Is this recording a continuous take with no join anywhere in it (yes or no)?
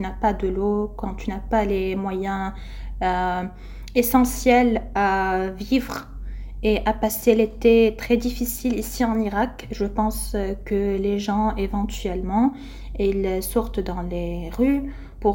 yes